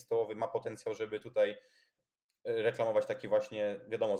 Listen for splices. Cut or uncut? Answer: uncut